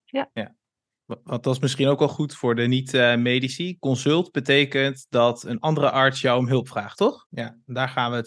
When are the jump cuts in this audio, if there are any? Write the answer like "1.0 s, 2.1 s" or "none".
7.3 s